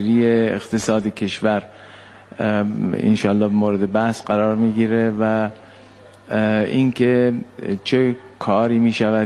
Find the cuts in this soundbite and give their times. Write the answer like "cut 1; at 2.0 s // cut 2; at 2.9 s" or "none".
none